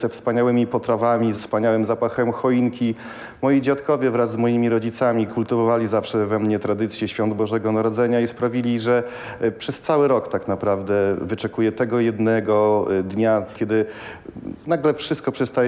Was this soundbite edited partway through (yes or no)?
yes